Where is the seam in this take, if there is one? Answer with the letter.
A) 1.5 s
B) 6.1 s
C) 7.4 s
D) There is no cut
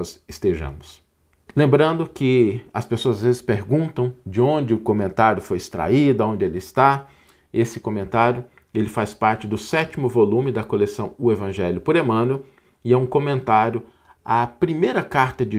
A